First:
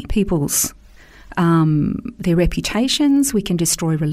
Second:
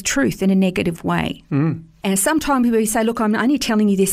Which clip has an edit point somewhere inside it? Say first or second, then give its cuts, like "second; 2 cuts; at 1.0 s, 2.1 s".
second; 1 cut; at 2.0 s